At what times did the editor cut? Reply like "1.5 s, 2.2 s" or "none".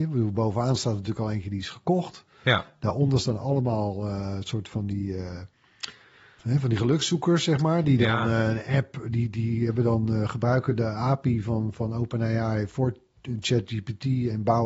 6.4 s